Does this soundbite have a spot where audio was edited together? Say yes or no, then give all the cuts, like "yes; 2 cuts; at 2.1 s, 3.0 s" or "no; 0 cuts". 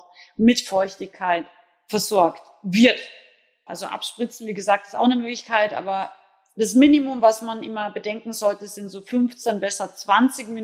yes; 1 cut; at 3.7 s